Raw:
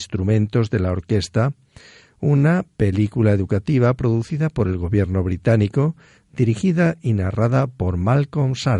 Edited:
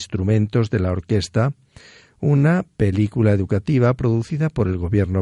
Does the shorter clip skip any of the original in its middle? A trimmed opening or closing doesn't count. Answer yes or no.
no